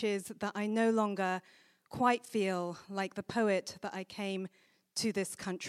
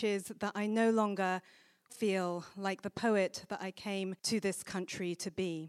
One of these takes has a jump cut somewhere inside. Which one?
second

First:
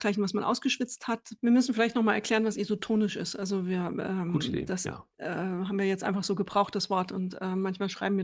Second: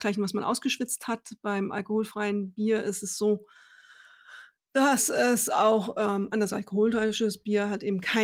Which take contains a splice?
first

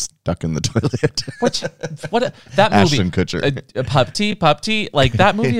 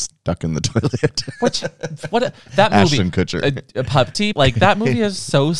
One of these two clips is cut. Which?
second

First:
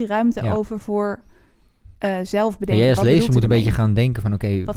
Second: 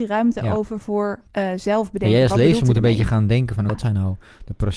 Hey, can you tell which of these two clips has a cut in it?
second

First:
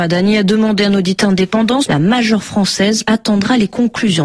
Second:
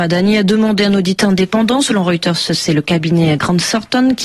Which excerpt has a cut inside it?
first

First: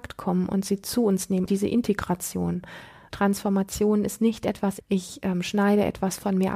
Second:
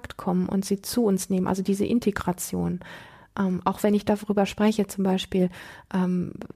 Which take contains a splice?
first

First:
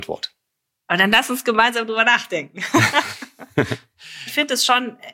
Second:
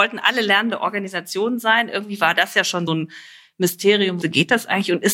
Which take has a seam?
second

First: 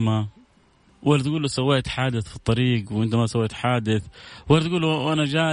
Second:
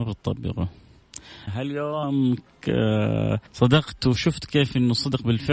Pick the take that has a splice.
second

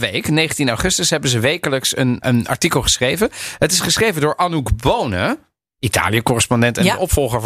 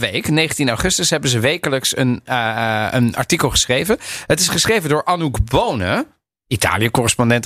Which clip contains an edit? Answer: first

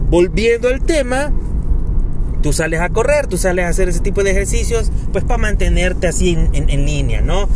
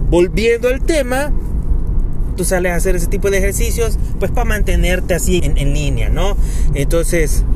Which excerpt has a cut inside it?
second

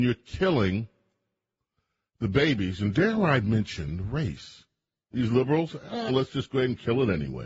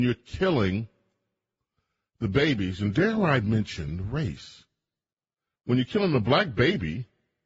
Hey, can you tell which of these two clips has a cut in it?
first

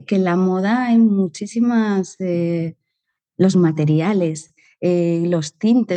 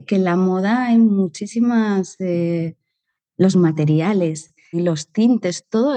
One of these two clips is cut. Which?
second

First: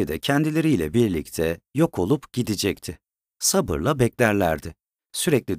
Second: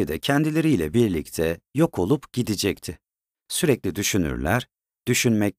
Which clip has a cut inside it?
second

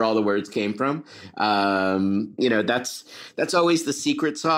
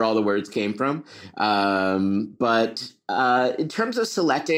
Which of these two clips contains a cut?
first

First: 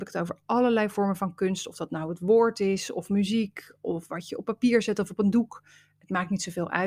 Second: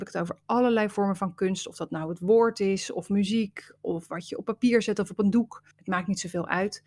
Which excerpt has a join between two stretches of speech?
second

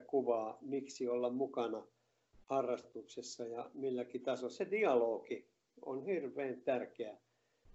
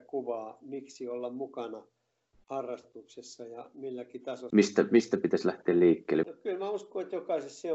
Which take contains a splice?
second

